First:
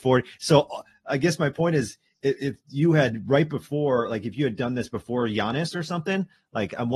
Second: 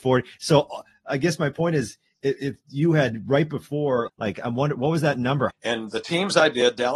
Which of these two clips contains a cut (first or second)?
second